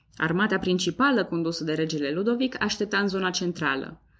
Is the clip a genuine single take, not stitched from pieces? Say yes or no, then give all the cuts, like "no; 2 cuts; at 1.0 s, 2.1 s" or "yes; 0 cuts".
yes; 0 cuts